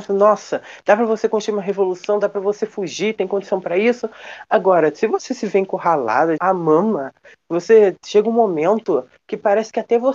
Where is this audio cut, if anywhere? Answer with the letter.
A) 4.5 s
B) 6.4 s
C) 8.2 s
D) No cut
B